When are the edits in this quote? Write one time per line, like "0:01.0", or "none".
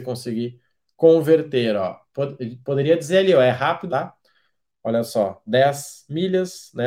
0:03.9